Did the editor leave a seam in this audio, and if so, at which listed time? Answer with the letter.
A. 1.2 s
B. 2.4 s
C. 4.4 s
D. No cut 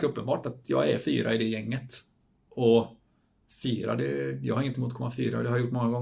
D